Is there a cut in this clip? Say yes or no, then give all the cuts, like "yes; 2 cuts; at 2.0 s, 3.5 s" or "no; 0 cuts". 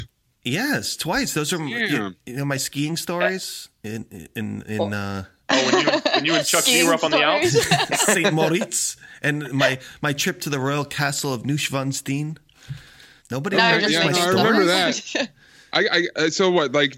yes; 1 cut; at 13.2 s